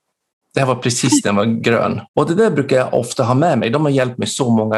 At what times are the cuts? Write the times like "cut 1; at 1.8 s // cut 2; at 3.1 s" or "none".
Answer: cut 1; at 2.1 s